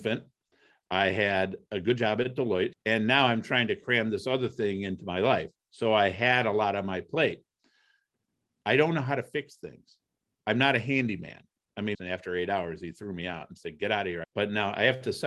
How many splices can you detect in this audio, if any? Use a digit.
3